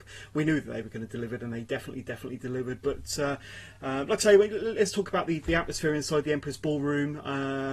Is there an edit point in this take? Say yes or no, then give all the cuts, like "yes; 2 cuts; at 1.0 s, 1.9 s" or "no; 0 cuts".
no; 0 cuts